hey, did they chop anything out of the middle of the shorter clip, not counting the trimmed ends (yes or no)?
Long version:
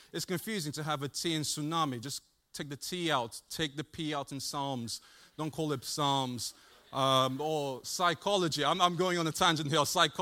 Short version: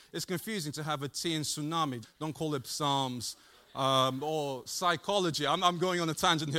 yes